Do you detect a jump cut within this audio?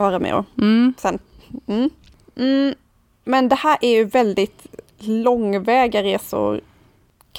no; 0 cuts

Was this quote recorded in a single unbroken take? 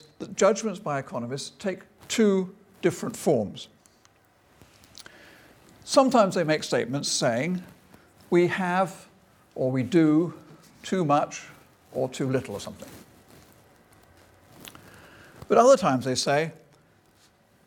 yes; 0 cuts

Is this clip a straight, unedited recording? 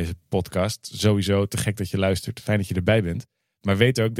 yes; 0 cuts

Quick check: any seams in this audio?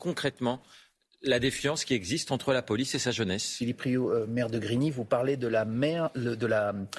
no; 0 cuts

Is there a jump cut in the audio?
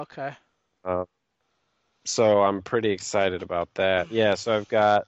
no; 0 cuts

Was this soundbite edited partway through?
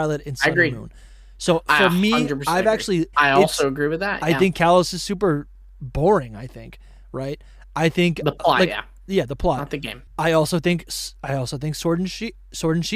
yes; 2 cuts; at 3.1 s, 10.1 s

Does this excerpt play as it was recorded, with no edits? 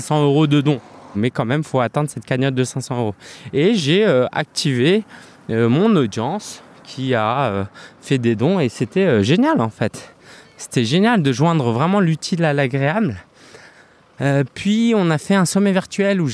no; 1 cut; at 1.1 s

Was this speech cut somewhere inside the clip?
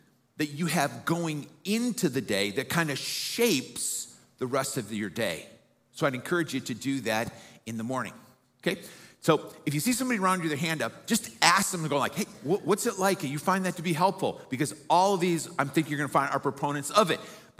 yes; 1 cut; at 8.4 s

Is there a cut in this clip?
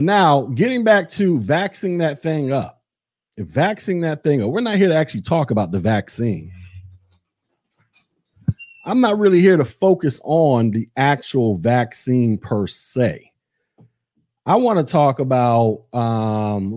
no; 0 cuts

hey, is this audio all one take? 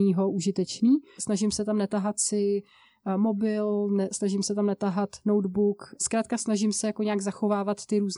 no; 2 cuts; at 1.2 s, 6.0 s

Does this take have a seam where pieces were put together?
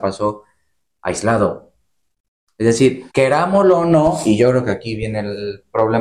yes; 1 cut; at 3.1 s

